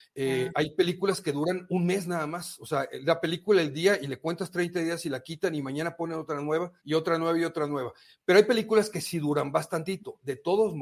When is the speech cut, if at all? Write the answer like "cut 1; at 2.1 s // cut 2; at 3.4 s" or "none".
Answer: cut 1; at 6.8 s